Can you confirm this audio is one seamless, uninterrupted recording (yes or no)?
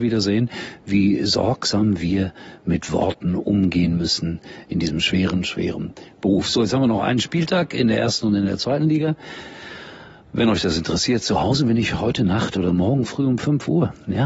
yes